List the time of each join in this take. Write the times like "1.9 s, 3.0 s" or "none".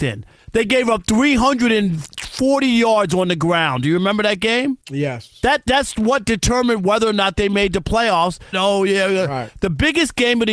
4.8 s, 8.5 s